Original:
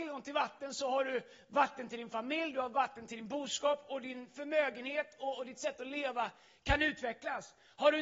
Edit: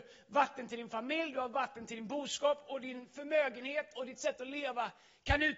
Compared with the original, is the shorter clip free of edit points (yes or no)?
no